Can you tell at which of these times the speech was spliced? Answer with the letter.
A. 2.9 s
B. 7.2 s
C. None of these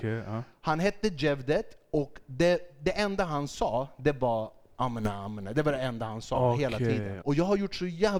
B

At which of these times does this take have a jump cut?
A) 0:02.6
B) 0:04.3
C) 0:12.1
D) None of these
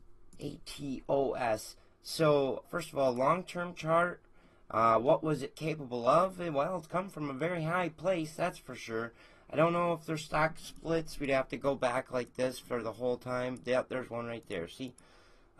A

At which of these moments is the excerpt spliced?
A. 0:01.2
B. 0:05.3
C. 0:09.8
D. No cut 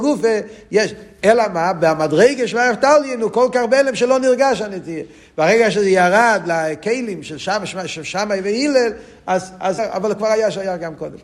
C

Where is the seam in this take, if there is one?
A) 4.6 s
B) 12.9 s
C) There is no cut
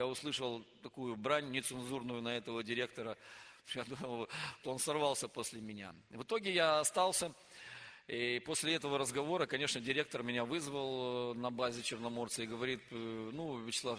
A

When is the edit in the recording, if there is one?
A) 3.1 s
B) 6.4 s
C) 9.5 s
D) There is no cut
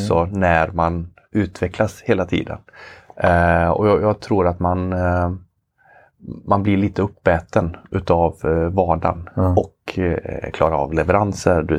D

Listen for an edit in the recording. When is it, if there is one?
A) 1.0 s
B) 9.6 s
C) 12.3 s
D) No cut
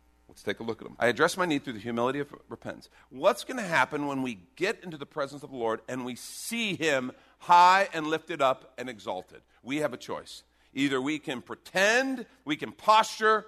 A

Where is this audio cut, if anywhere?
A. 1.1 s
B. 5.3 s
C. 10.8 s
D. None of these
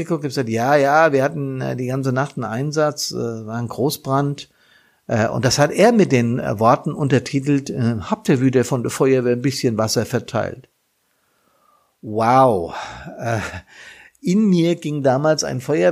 D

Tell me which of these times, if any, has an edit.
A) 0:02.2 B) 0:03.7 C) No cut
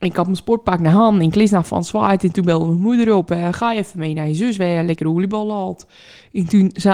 C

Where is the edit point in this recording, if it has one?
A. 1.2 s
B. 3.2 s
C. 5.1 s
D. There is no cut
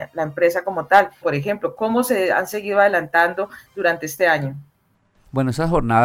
A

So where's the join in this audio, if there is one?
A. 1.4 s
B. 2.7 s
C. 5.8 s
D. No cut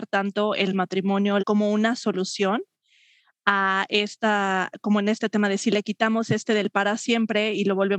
A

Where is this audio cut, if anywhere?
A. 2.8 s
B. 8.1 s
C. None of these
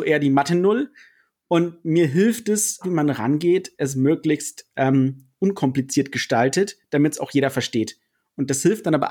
A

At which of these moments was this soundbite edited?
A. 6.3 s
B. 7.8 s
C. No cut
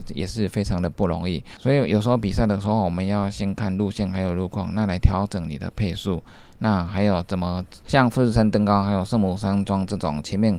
B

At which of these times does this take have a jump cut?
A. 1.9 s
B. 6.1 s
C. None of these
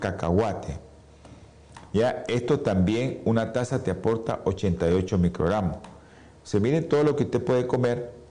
C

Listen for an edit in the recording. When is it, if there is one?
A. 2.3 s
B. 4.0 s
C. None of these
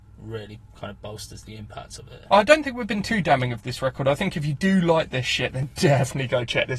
A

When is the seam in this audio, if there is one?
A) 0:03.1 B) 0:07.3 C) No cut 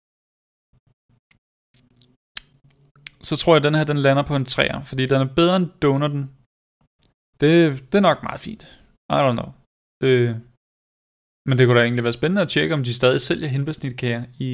B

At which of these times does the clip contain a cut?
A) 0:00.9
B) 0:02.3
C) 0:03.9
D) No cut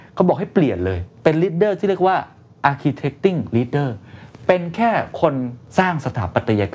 D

